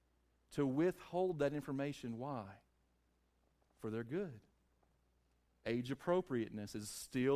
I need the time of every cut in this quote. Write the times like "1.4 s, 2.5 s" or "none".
none